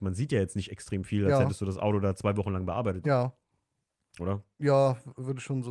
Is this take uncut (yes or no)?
no